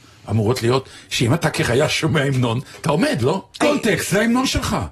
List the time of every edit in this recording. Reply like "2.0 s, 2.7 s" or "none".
3.6 s